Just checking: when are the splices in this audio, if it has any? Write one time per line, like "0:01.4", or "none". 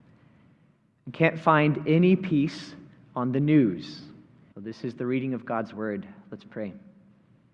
0:04.5